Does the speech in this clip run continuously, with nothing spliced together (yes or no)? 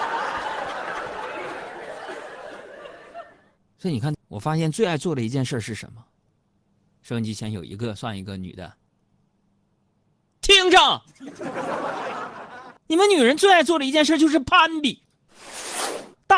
no